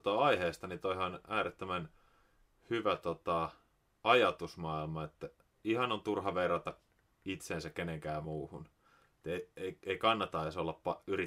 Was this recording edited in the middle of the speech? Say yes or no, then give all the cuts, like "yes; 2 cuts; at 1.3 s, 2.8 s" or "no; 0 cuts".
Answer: no; 0 cuts